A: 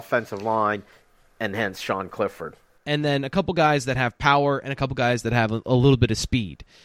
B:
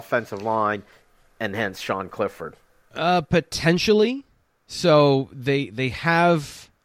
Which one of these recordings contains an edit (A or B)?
A